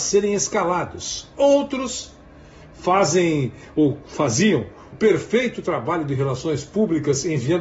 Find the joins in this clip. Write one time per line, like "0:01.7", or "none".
0:04.9